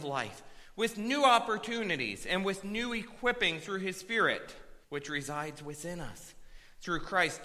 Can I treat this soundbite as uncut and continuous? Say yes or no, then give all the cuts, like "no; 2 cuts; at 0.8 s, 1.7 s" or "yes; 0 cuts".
no; 1 cut; at 4.8 s